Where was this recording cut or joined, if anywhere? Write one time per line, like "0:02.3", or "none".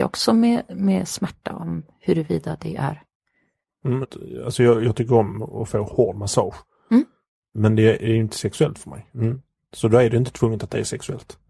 0:04.0
0:09.1